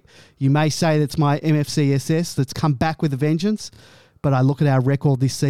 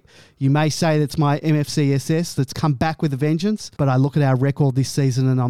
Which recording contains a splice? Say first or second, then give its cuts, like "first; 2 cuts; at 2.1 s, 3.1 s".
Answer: second; 1 cut; at 3.7 s